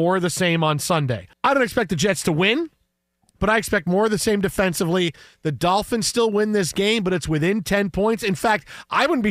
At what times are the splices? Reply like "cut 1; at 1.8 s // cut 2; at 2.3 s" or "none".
cut 1; at 1.3 s // cut 2; at 5.3 s